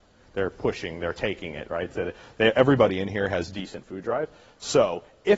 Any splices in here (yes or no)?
no